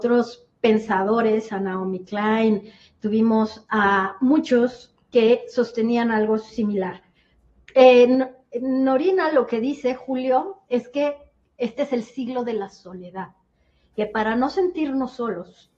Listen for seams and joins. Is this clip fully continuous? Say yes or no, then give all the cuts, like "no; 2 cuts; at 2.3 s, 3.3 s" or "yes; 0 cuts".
no; 1 cut; at 13.9 s